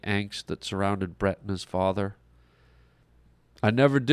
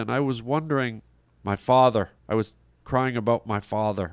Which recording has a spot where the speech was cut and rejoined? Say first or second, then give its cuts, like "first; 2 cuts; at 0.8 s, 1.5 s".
second; 1 cut; at 2.2 s